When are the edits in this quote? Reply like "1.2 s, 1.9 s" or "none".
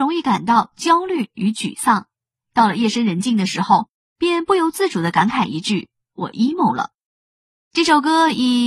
none